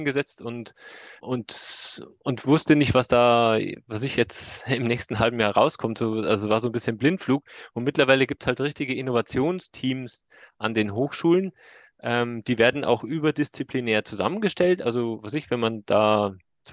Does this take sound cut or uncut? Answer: cut